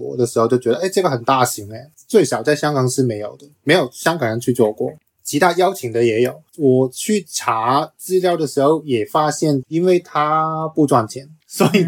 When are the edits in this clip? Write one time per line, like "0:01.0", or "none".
0:06.5
0:09.6